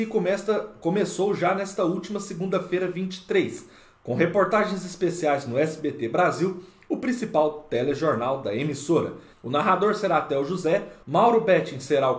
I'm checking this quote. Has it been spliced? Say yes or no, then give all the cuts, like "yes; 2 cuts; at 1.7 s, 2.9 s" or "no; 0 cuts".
yes; 2 cuts; at 9.3 s, 11.0 s